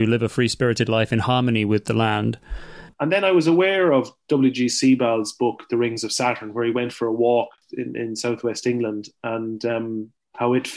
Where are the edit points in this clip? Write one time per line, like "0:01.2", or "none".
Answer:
0:02.9